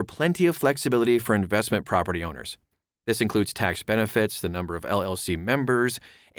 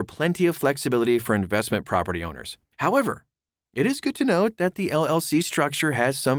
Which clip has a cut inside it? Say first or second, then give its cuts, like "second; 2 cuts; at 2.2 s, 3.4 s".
second; 1 cut; at 2.7 s